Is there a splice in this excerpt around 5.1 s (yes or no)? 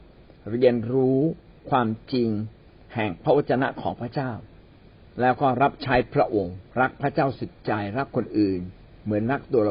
no